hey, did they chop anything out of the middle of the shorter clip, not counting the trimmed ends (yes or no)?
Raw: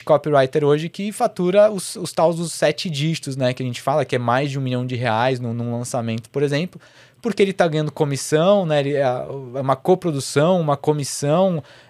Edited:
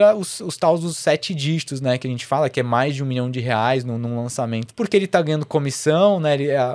yes